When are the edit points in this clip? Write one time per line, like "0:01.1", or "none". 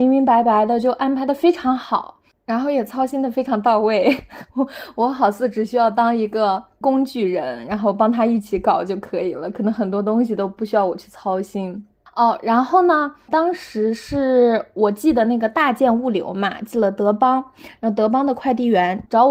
none